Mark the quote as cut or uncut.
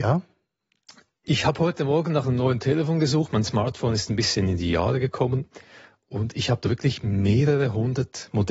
uncut